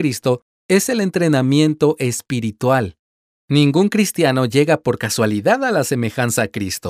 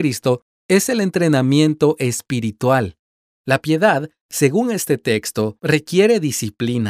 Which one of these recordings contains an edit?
second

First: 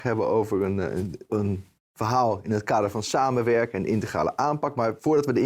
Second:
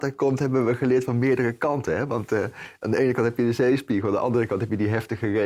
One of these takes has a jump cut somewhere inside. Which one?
first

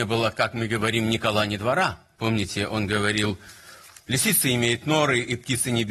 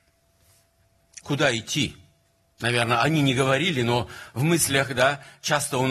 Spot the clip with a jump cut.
first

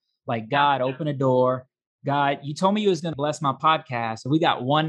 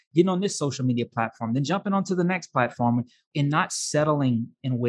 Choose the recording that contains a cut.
first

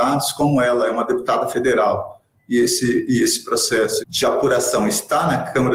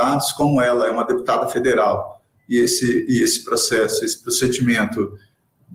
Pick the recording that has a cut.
first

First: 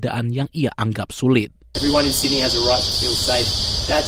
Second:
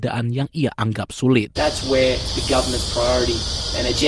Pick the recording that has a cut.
second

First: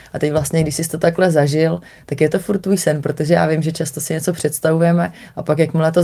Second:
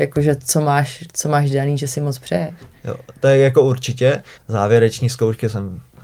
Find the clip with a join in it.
second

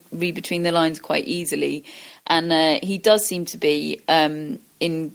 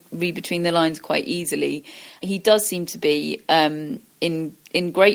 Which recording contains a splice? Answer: second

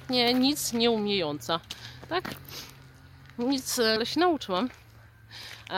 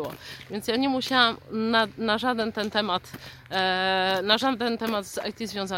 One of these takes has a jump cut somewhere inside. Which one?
first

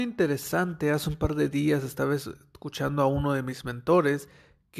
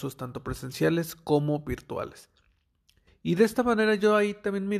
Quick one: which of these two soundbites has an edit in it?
second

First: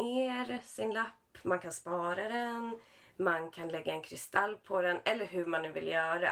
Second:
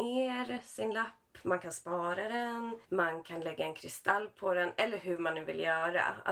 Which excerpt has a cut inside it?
second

